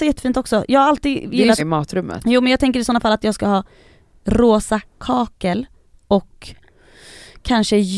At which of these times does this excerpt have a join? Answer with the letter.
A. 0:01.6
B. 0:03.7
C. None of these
A